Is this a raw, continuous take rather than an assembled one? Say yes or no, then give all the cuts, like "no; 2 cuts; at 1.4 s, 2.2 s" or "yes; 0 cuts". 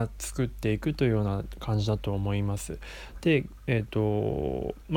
yes; 0 cuts